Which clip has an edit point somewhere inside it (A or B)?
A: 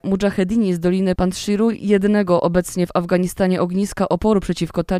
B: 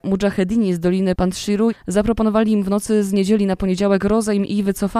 B